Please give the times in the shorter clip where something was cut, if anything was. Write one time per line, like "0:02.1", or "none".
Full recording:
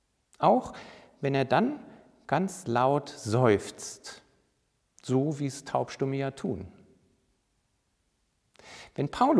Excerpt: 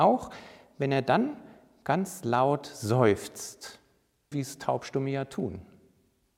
0:04.3